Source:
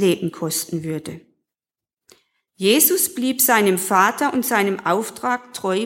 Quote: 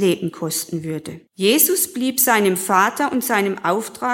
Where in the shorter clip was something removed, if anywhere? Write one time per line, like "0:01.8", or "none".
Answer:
0:01.3